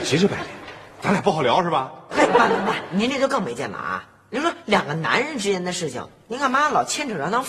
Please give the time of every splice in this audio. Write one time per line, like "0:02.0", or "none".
0:02.1

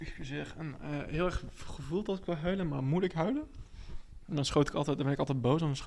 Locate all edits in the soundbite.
none

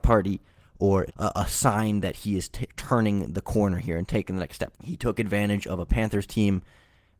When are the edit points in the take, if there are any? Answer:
0:01.1
0:04.7

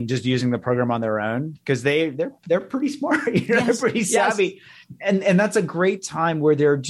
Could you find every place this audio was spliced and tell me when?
none

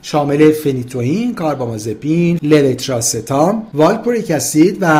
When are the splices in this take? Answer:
0:02.4

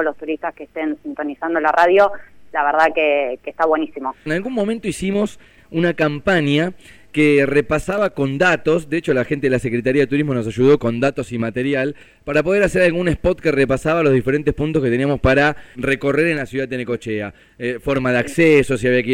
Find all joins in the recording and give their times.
0:04.3
0:10.8
0:15.7

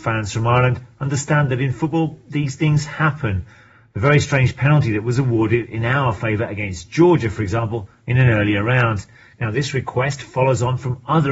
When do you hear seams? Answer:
none

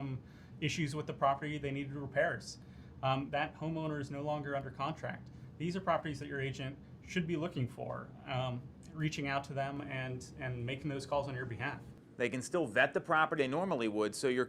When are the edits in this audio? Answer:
0:03.3
0:12.1
0:13.4

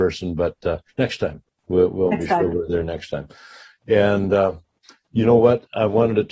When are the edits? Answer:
none

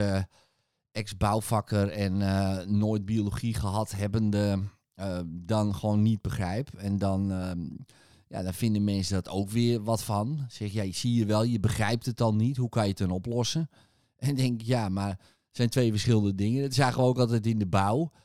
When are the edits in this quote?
none

